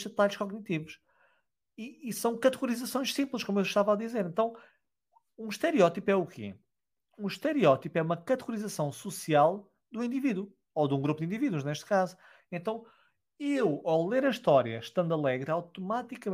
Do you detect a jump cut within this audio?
no; 0 cuts

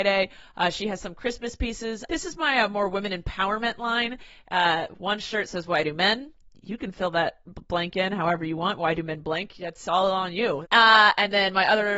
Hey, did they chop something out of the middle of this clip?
yes; 2 cuts; at 2.1 s, 10.6 s

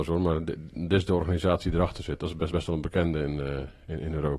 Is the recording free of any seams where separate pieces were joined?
yes; 0 cuts

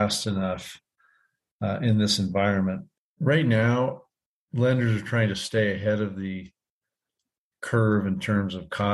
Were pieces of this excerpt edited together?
yes; 1 cut; at 3.0 s

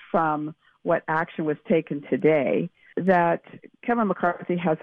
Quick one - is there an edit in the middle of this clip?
yes; 1 cut; at 2.9 s

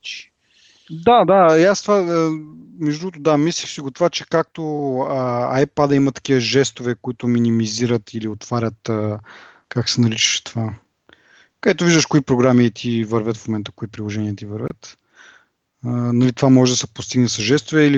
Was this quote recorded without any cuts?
no; 1 cut; at 9.6 s

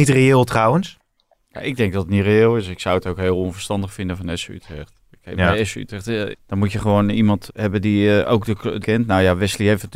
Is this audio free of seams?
no; 3 cuts; at 6.3 s, 7.5 s, 8.8 s

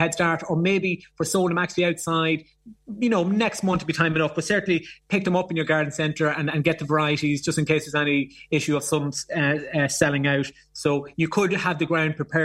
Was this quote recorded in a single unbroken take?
yes; 0 cuts

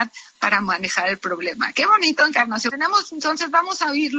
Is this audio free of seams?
no; 1 cut; at 2.7 s

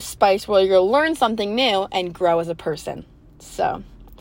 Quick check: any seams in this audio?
no; 0 cuts

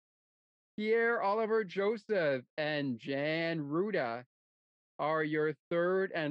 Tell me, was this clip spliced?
no; 0 cuts

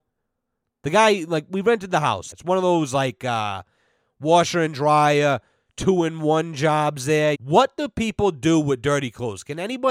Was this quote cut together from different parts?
yes; 2 cuts; at 2.3 s, 7.3 s

